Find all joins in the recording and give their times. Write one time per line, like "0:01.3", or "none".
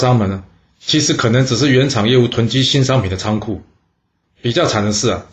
0:04.2